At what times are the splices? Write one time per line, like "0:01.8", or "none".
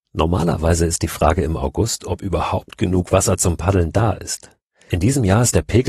none

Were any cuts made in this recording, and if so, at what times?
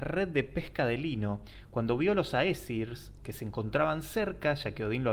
0:03.2

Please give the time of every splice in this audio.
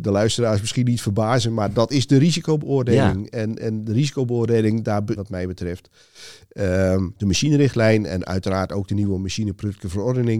0:05.2
0:07.2

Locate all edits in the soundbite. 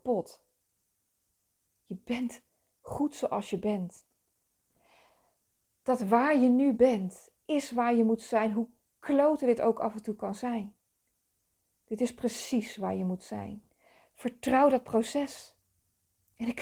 none

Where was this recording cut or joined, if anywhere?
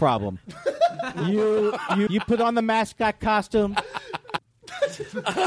0:02.1
0:04.4

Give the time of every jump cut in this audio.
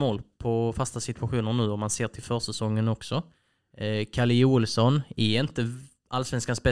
none

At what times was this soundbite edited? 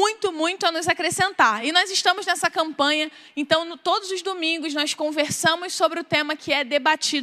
none

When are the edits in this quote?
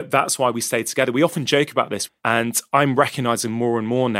0:02.1

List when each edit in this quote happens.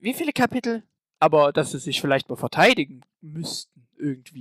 0:01.0

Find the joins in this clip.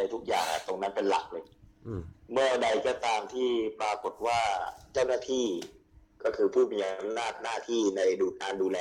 none

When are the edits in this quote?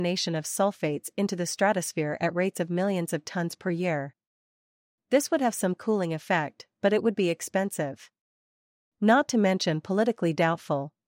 none

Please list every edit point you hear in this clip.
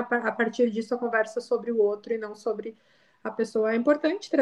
none

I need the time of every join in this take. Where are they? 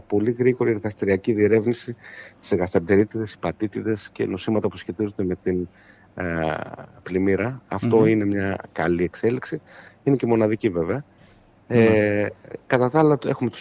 none

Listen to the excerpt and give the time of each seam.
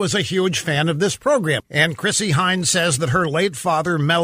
0:01.6

